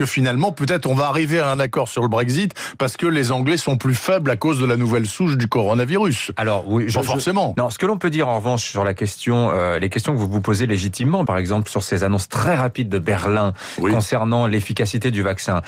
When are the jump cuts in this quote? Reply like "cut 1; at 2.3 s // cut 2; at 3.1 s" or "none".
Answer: cut 1; at 7.5 s // cut 2; at 11.3 s